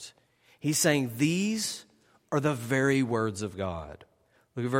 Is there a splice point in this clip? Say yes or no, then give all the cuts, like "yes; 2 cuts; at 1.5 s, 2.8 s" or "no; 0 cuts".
no; 0 cuts